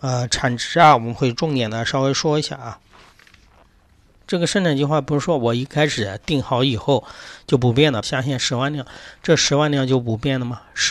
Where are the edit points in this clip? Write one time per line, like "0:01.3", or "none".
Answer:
0:04.2
0:08.0